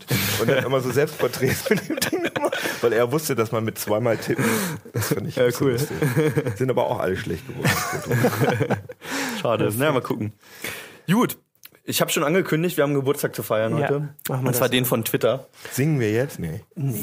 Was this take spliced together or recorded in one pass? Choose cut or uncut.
cut